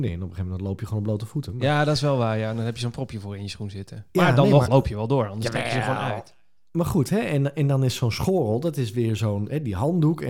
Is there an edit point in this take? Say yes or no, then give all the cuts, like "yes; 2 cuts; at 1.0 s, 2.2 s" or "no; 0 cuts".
no; 0 cuts